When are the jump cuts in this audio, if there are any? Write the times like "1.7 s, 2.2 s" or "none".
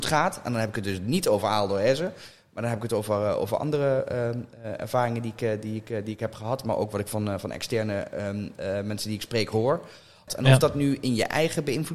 10.3 s